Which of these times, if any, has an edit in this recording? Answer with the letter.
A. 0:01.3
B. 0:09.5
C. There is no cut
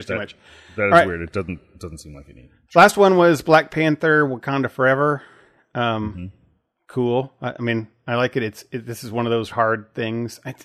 B